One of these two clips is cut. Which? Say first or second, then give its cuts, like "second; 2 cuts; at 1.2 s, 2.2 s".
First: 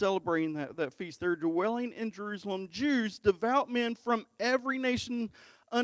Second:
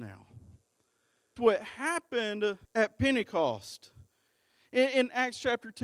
second; 2 cuts; at 1.4 s, 2.6 s